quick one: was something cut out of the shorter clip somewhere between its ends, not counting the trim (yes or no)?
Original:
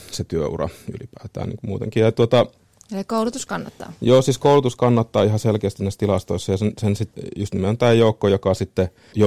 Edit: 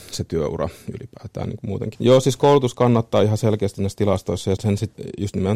yes